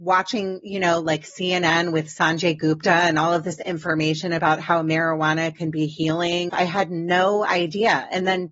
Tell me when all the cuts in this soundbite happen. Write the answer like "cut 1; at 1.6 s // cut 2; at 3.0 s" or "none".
cut 1; at 6.5 s